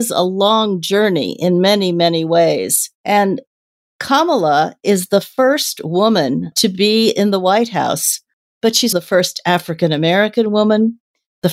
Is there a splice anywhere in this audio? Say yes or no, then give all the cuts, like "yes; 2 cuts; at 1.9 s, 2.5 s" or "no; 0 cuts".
yes; 2 cuts; at 3.0 s, 8.9 s